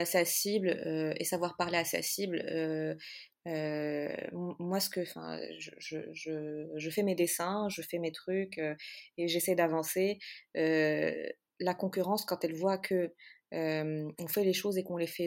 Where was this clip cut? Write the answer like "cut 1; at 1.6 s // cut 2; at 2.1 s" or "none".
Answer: cut 1; at 3.3 s